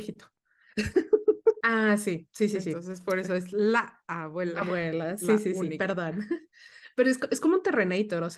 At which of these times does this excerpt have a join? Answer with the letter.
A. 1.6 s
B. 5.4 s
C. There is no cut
A